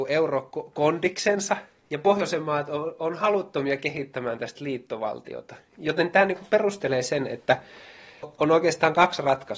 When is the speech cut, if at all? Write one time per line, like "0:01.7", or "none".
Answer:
none